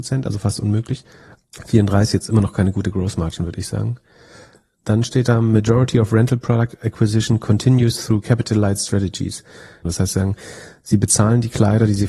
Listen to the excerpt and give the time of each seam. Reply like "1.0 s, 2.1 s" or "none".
9.9 s